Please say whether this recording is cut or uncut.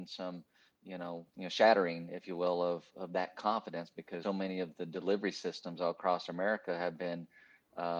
cut